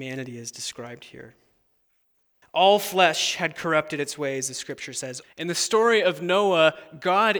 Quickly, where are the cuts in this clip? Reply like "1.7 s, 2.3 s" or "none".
2.4 s, 5.2 s